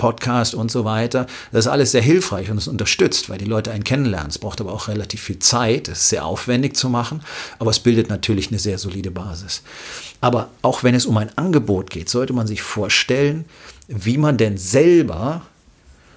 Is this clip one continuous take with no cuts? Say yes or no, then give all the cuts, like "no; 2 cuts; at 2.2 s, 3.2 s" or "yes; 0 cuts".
yes; 0 cuts